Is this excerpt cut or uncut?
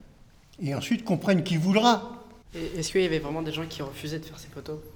cut